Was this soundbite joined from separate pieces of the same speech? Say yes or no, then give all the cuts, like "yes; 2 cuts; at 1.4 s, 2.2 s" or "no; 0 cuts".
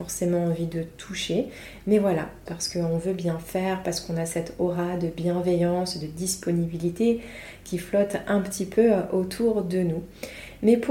yes; 1 cut; at 2.5 s